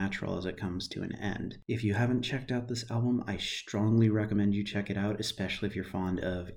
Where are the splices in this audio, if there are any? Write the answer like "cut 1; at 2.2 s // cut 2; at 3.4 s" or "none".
none